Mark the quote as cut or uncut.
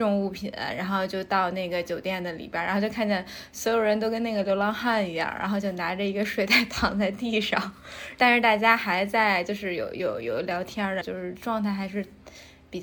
cut